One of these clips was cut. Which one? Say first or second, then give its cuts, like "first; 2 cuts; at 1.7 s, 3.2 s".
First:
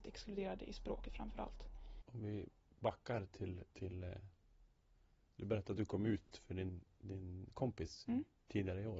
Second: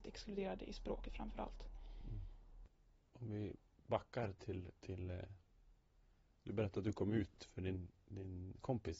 first; 1 cut; at 2.0 s